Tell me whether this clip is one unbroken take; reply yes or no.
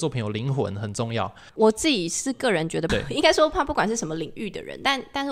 no